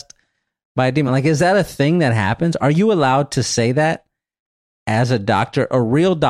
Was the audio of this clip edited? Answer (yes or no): no